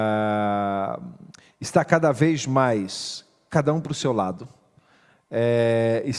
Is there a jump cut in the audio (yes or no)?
no